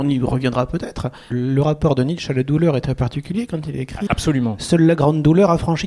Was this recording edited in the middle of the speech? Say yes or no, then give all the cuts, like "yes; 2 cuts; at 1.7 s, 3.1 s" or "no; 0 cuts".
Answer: yes; 2 cuts; at 1.3 s, 4.1 s